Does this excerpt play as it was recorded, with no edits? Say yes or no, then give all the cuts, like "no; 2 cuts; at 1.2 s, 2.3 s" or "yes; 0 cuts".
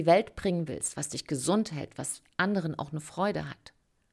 no; 1 cut; at 0.9 s